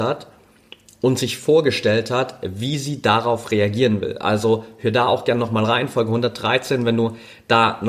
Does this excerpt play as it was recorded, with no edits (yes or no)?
yes